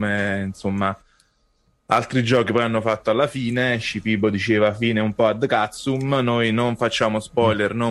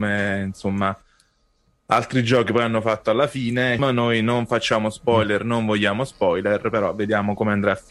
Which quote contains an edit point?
second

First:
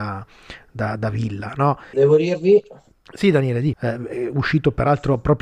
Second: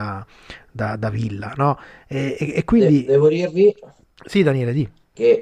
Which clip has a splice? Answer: first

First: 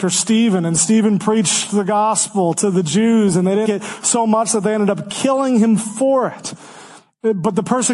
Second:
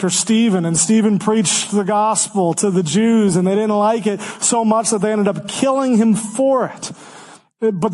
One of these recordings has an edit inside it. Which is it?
first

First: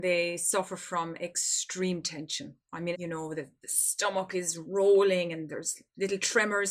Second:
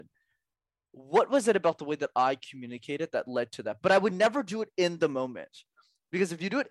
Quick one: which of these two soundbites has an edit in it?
first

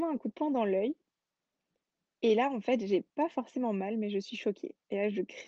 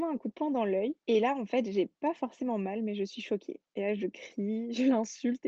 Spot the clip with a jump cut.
second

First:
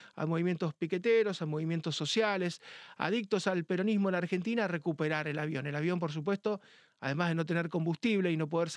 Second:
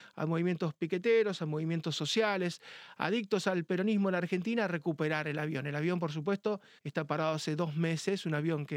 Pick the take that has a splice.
second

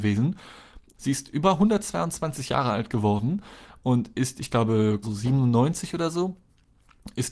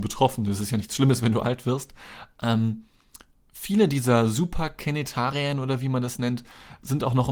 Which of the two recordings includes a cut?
first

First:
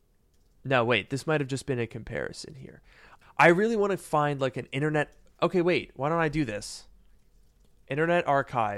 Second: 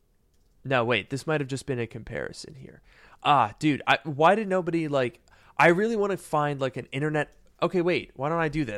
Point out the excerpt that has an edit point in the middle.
first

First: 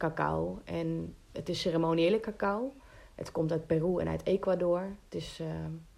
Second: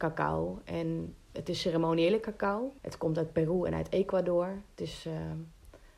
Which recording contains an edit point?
second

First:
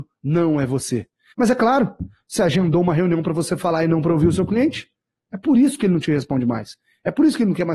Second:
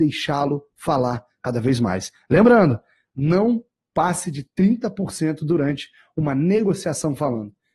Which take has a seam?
first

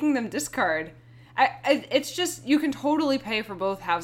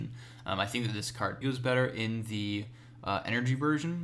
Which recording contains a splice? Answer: second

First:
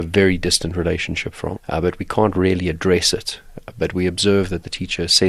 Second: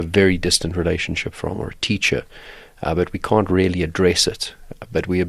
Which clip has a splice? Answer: first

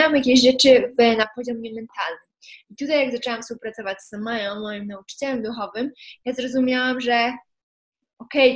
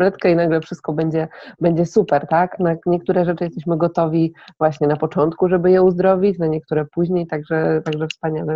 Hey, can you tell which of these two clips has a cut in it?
second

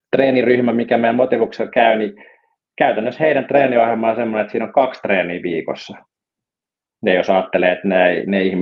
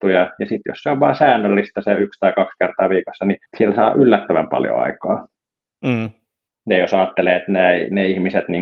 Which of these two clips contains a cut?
second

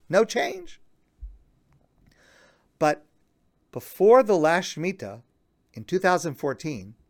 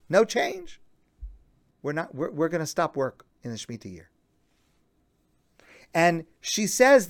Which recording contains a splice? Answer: second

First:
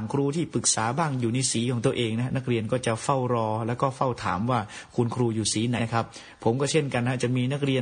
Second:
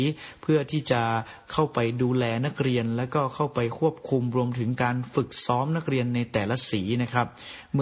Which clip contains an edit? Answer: first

